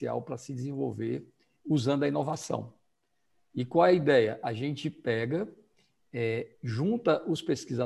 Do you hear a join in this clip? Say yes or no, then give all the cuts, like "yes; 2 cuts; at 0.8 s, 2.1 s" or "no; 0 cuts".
no; 0 cuts